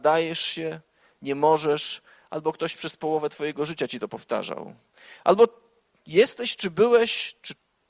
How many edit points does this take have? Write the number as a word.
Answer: zero